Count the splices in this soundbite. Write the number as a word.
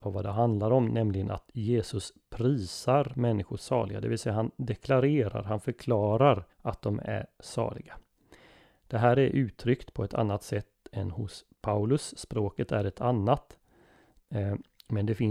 one